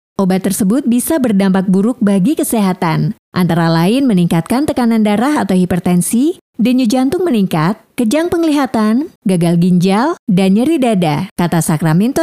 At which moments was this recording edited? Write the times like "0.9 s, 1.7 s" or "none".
7.9 s, 9.2 s